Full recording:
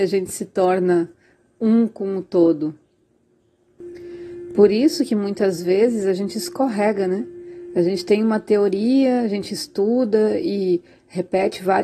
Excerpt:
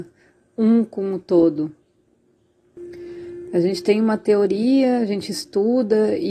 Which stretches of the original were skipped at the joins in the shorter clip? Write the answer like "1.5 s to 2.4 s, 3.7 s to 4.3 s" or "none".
4.5 s to 7.7 s

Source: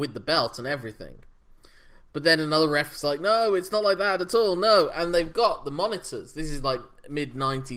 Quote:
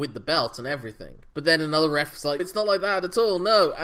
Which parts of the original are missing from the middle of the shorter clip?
1.3 s to 2.1 s, 3.2 s to 3.6 s

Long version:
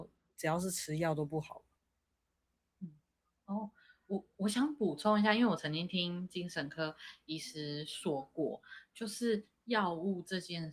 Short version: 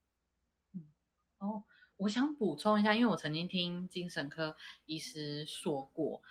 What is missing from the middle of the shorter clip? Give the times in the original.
4.0 s to 4.3 s

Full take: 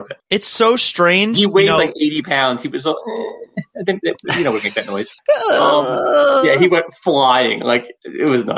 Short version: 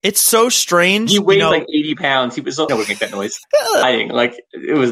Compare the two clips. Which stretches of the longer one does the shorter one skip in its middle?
3.0 s to 4.4 s, 5.6 s to 7.3 s

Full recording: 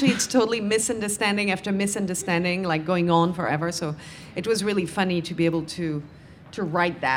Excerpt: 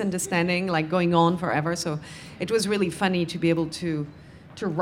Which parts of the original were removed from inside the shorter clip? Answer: none

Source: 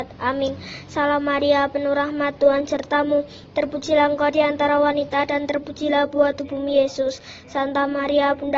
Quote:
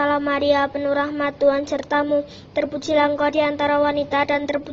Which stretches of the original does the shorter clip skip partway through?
none

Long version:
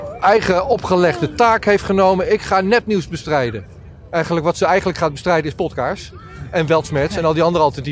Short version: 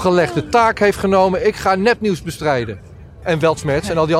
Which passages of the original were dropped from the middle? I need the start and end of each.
4.1 s to 6.5 s

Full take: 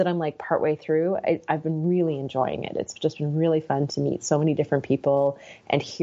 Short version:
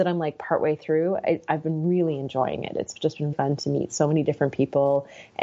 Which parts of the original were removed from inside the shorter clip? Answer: 3.3 s to 3.6 s

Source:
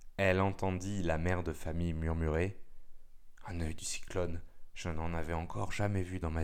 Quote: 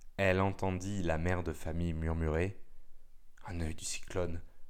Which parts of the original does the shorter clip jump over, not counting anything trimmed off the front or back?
none

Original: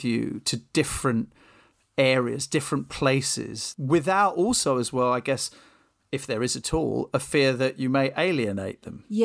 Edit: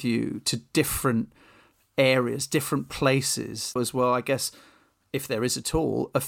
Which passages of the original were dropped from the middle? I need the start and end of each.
3.8 s to 4.7 s

